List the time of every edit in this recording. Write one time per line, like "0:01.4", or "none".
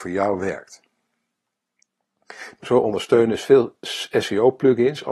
0:02.6

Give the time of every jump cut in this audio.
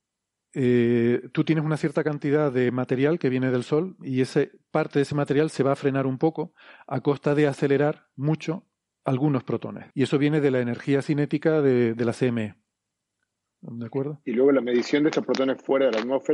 0:09.9

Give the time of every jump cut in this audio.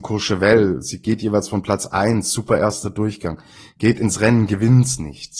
none

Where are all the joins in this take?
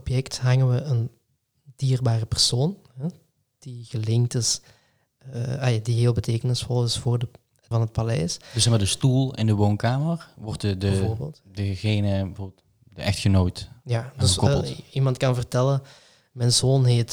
0:07.7

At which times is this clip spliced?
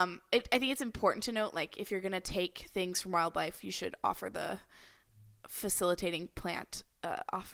none

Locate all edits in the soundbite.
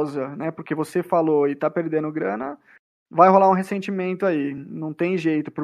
none

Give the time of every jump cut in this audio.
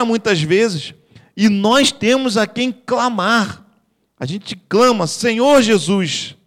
none

